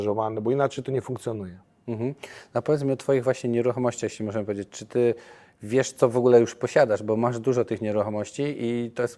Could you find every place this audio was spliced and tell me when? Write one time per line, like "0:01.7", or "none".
none